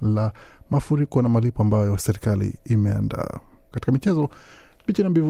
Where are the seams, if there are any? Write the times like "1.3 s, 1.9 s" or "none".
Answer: 3.7 s